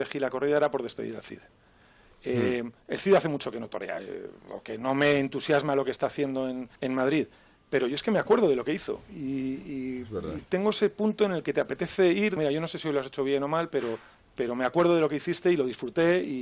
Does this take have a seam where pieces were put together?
yes; 3 cuts; at 6.8 s, 10.4 s, 12.4 s

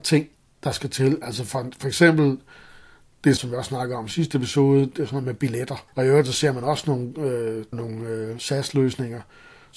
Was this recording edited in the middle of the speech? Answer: yes; 3 cuts; at 3.4 s, 5.9 s, 7.7 s

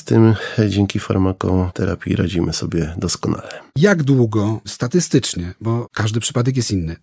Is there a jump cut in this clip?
no; 0 cuts

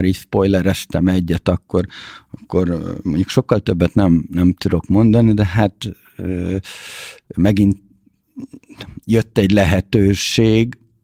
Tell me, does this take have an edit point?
no; 0 cuts

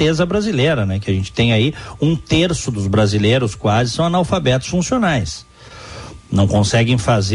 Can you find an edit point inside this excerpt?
no; 0 cuts

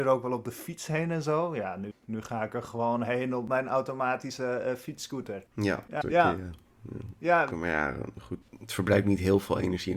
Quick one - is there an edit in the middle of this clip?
yes; 3 cuts; at 1.9 s, 6.0 s, 7.5 s

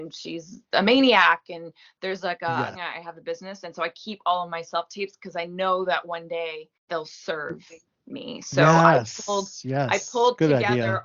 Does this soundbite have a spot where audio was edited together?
yes; 2 cuts; at 2.7 s, 6.8 s

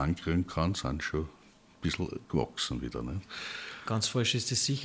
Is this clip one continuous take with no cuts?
yes; 0 cuts

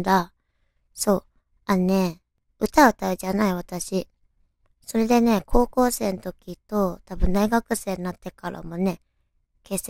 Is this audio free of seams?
yes; 0 cuts

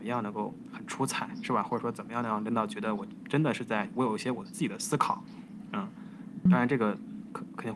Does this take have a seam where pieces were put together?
yes; 2 cuts; at 3.2 s, 6.5 s

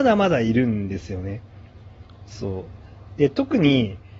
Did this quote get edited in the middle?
yes; 1 cut; at 3.1 s

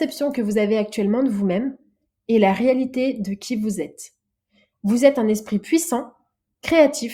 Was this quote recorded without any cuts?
yes; 0 cuts

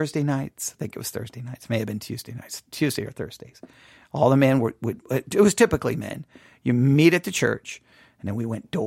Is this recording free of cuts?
yes; 0 cuts

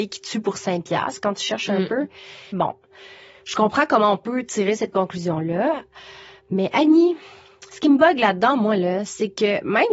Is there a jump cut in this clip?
yes; 1 cut; at 2.5 s

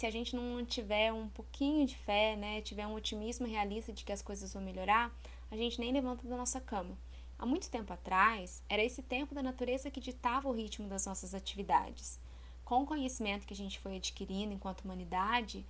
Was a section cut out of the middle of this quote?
yes; 1 cut; at 7.3 s

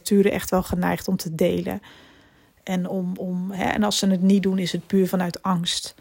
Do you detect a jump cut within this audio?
no; 0 cuts

